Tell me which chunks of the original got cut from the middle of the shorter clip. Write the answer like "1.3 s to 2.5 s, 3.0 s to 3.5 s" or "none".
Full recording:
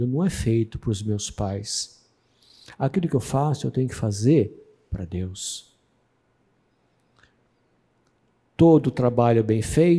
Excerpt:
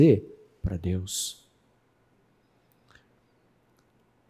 none